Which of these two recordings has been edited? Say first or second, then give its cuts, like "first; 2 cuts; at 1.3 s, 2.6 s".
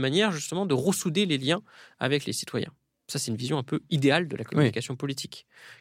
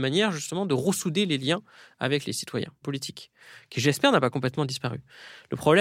second; 1 cut; at 2.8 s